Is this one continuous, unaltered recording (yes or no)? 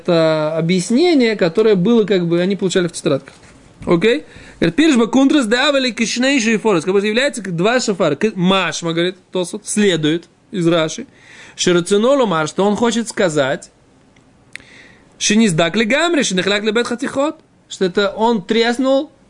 yes